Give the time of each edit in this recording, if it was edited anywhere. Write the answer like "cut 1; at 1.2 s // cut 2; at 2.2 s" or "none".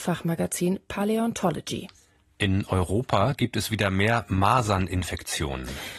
none